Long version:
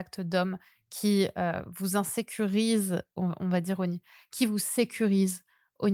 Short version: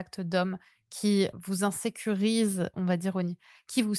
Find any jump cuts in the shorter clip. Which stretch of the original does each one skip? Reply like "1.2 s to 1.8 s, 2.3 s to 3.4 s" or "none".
1.3 s to 1.6 s, 3.1 s to 3.4 s